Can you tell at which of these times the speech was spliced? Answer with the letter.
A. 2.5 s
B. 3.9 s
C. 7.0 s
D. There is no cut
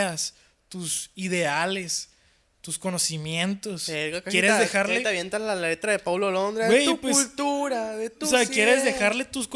D